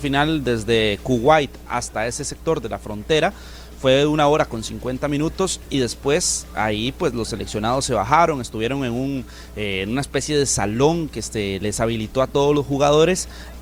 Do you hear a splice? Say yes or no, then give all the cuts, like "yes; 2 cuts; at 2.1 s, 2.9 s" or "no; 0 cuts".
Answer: no; 0 cuts